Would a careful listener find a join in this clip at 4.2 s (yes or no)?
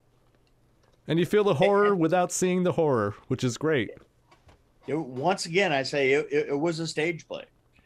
no